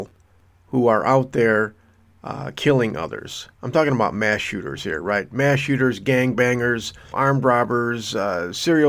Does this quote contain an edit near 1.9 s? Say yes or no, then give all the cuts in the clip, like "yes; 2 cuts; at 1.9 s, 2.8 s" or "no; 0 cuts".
no; 2 cuts; at 3.5 s, 7.1 s